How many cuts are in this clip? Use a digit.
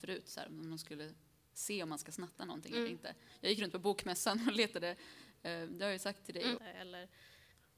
1